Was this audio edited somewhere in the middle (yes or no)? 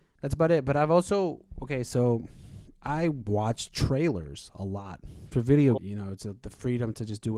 yes